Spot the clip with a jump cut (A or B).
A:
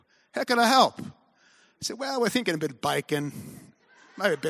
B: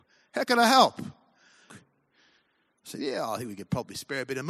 B